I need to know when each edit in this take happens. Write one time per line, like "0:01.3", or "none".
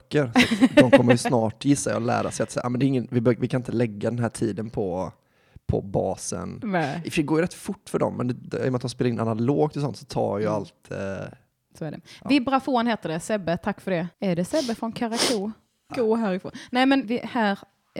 0:14.1
0:15.9
0:17.0